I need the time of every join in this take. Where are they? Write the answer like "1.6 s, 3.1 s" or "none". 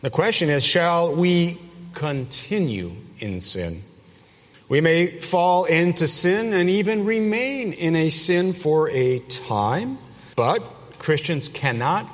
4.5 s, 10.3 s